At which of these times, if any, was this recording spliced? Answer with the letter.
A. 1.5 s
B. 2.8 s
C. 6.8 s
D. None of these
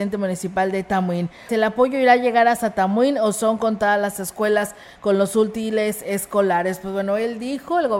A